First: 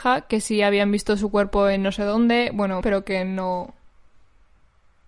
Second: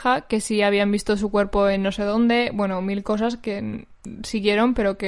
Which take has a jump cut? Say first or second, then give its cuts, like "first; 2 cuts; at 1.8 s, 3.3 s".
first; 1 cut; at 2.8 s